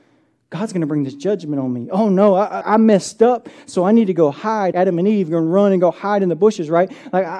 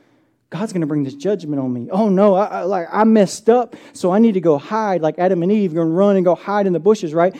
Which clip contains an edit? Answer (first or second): first